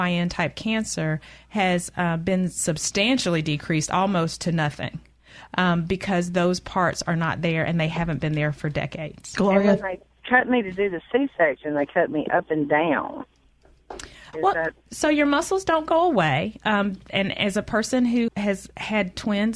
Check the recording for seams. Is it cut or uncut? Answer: cut